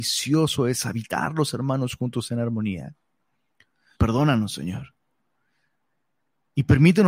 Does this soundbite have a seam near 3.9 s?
yes; 1 cut; at 3.9 s

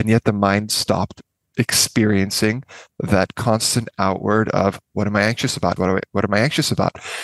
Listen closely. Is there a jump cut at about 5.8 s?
yes; 1 cut; at 5.8 s

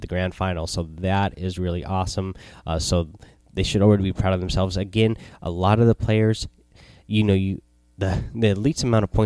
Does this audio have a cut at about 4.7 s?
no; 0 cuts

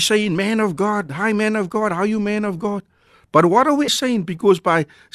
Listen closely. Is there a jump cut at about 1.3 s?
no; 1 cut; at 3.9 s

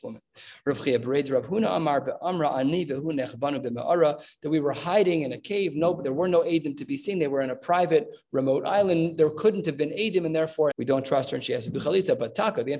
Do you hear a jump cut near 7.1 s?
no; 1 cut; at 10.7 s

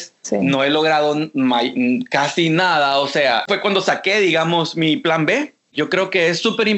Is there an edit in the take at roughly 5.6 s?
no; 1 cut; at 3.5 s

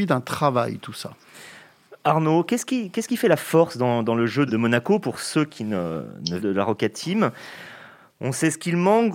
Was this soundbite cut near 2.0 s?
no; 2 cuts; at 4.5 s, 6.4 s

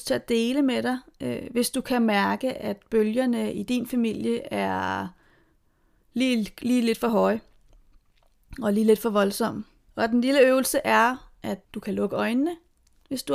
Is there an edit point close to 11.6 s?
yes; 2 cuts; at 9.9 s, 11.6 s

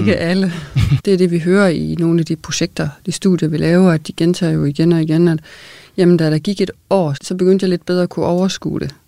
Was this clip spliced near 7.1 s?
yes; 2 cuts; at 1.0 s, 7.1 s

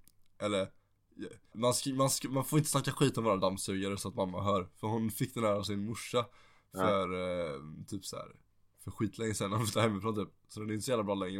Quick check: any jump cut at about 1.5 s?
yes; 1 cut; at 1.5 s

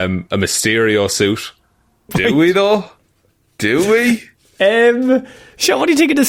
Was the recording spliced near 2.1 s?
yes; 1 cut; at 2.1 s

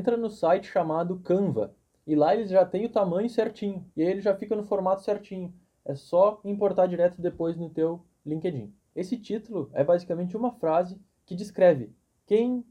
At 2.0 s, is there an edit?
no; 2 cuts; at 3.9 s, 8.9 s

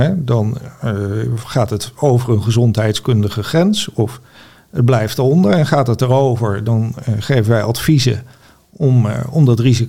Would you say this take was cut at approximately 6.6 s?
no; 0 cuts

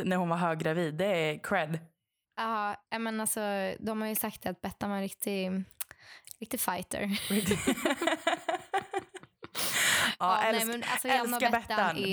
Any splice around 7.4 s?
no; 0 cuts

